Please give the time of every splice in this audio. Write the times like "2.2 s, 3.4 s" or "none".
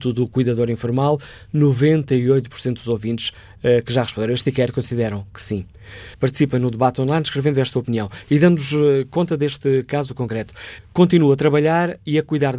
6.1 s, 10.8 s